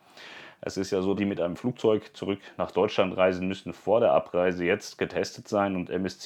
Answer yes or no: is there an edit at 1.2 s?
yes